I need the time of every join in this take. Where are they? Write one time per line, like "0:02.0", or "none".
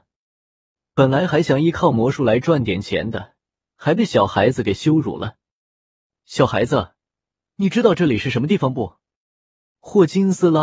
0:03.7

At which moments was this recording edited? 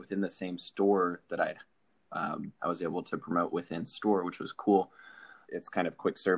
0:02.6
0:05.5

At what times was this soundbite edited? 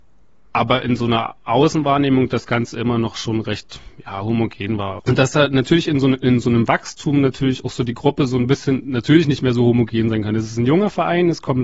0:05.0

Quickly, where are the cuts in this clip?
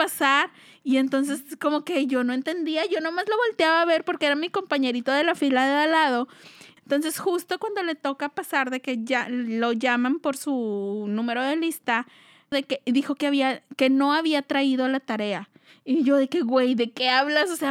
0:06.8
0:12.5

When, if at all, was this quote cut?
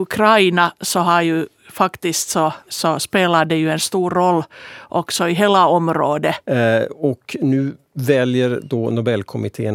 0:02.7
0:06.4

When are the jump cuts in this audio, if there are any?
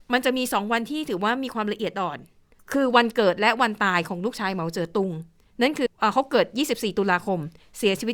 0:05.9

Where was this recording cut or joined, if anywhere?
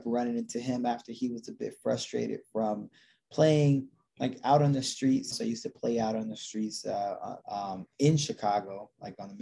0:05.3
0:07.4

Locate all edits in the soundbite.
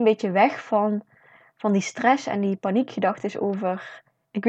none

